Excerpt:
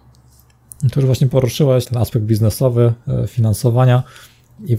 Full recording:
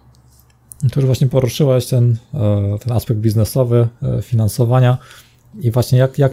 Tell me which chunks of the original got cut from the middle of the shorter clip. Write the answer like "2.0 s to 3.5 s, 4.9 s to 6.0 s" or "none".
1.8 s to 2.8 s